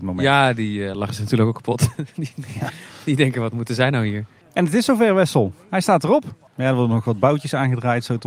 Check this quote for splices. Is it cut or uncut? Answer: cut